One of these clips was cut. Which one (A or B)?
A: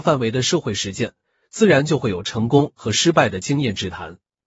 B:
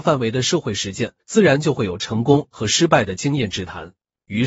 B